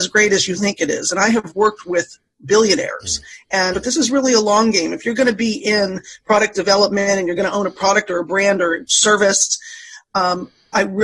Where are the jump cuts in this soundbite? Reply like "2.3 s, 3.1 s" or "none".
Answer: 3.7 s